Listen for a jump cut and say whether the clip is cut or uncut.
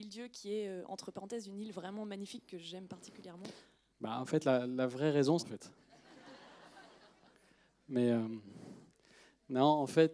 cut